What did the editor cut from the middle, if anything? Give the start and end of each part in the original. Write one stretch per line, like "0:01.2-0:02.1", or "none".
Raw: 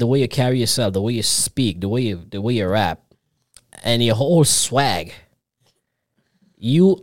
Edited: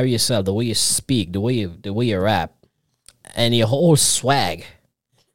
none

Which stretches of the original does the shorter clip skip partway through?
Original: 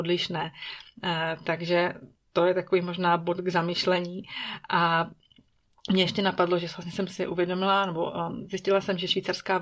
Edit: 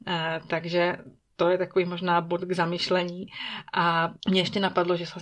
0:05.2-0:05.8

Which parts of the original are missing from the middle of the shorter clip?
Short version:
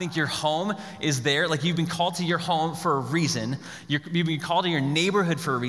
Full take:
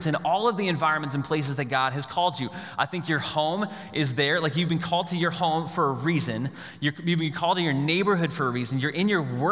none

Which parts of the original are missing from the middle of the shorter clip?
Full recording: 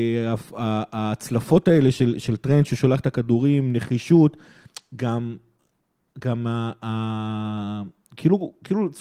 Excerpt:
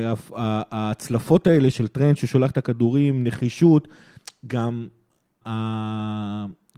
0:01.9-0:02.2
0:05.9-0:06.8

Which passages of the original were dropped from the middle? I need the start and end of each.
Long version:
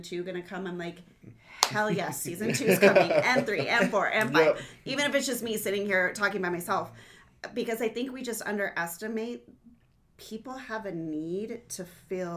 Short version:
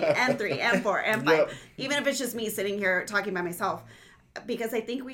none

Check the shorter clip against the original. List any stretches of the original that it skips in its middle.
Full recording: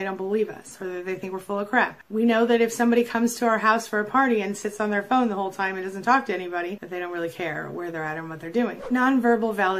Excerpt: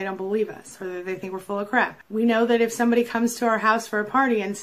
none

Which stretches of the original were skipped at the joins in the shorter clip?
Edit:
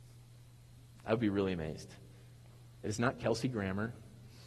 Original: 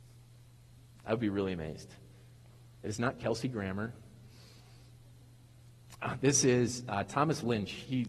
none

